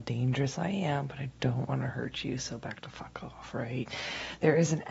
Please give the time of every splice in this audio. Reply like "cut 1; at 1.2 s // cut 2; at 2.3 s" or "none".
none